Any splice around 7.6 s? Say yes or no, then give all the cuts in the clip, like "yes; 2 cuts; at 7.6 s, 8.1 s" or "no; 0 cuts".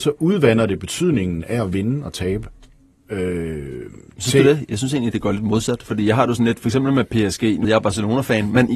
yes; 1 cut; at 7.6 s